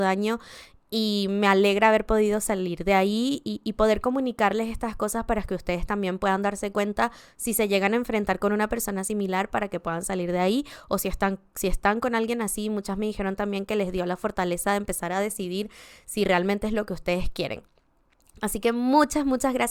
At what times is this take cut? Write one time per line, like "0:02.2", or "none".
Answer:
none